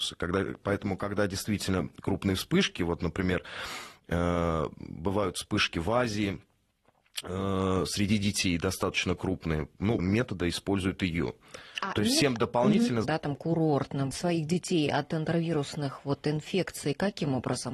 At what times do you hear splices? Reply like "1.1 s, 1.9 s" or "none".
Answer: 10.0 s, 13.0 s, 14.1 s